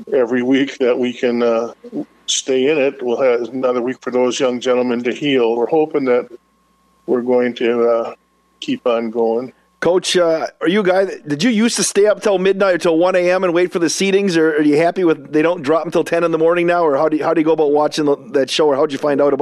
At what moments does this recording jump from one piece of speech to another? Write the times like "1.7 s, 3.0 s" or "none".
5.6 s